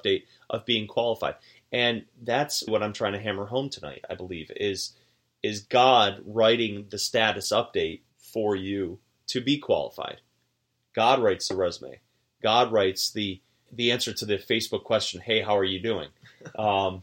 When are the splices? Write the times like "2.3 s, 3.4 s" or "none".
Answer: 2.7 s, 8.1 s, 13.7 s